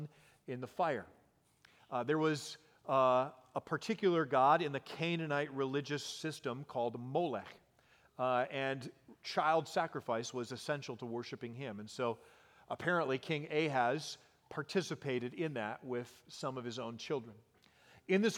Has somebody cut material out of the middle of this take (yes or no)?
no